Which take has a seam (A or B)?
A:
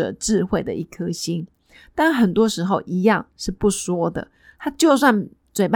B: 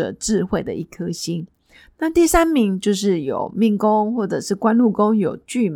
B